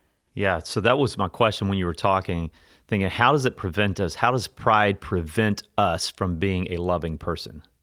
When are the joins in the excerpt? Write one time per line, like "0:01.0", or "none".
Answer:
none